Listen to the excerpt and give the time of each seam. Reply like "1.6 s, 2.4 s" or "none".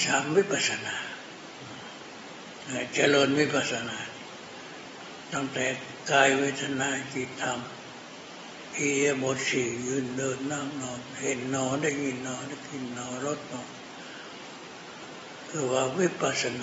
none